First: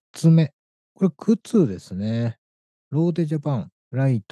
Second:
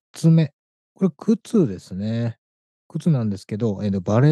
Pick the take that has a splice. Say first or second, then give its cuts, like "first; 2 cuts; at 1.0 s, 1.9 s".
first; 1 cut; at 2.7 s